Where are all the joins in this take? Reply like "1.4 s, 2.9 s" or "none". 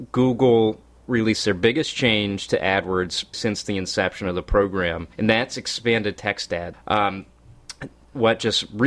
3.3 s, 5.1 s, 6.7 s

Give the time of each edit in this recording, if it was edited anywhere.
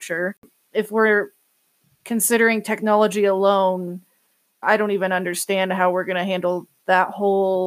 4.6 s

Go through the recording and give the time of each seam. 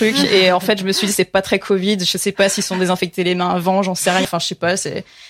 4.2 s

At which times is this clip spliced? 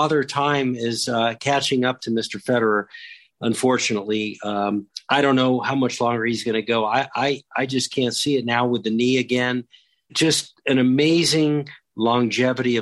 none

